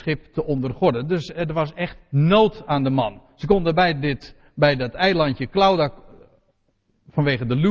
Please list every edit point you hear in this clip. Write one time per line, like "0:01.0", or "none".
none